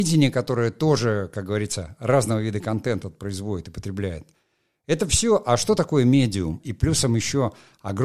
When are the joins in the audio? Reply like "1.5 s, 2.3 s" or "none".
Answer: 6.6 s

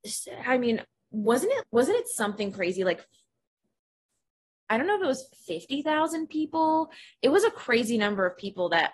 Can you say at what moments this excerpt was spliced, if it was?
1.6 s, 5.3 s

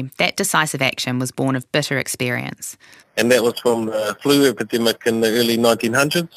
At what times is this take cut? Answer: 3.0 s

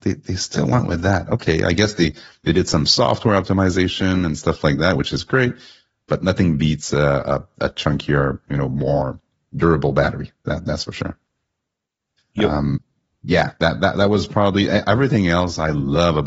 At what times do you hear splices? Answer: 12.2 s

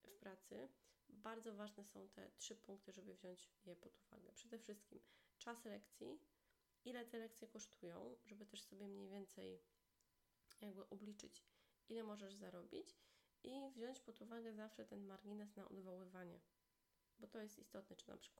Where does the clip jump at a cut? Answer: none

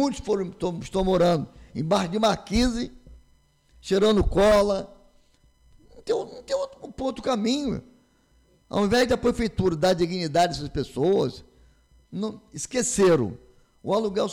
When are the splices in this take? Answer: 12.0 s

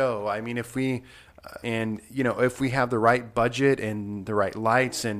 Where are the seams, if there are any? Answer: 1.6 s

